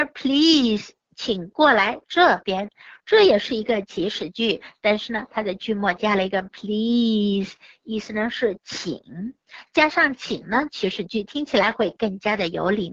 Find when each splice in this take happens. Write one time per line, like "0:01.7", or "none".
none